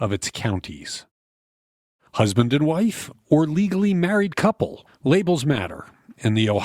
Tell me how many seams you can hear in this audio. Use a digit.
0